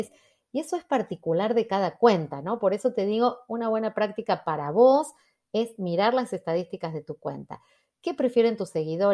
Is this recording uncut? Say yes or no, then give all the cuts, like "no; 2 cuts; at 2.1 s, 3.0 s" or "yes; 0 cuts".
yes; 0 cuts